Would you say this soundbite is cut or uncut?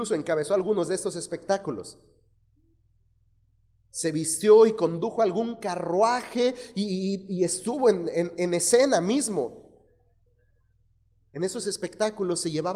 uncut